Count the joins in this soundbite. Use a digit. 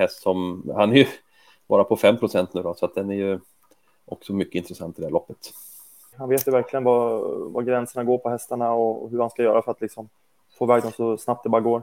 1